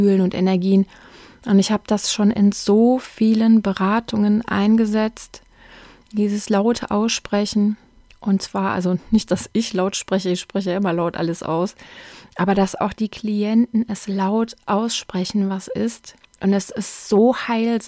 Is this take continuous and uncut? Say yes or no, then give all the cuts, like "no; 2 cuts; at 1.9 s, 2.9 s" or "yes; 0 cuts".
yes; 0 cuts